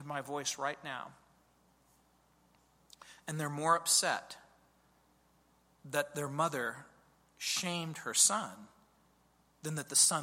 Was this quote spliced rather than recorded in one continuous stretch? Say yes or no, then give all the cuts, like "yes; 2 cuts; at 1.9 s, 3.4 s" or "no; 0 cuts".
no; 0 cuts